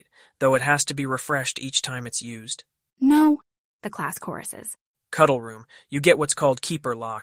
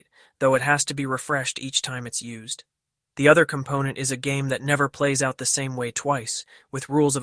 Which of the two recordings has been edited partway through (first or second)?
first